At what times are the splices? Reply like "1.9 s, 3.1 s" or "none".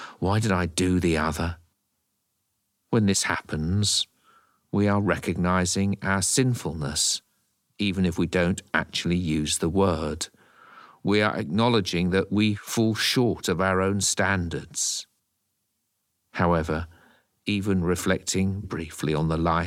18.6 s